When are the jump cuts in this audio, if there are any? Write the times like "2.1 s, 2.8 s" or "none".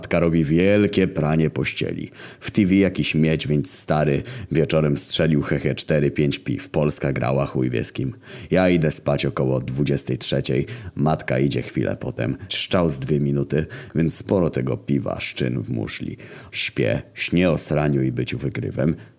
2.4 s, 12.5 s, 16.5 s